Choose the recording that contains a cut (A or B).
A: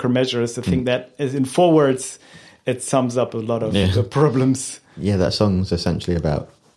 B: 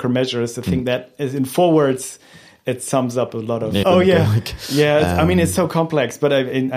B